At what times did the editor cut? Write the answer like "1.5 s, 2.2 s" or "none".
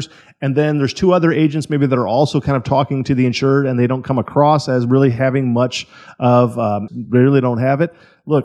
6.9 s